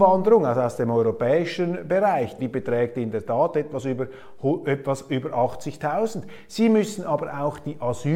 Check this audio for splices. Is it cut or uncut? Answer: cut